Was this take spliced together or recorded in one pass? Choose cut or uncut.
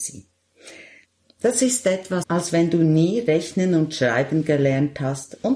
cut